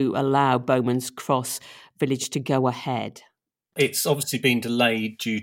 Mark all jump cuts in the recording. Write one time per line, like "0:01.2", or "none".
none